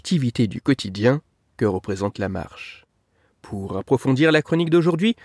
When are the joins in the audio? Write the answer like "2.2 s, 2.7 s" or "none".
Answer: none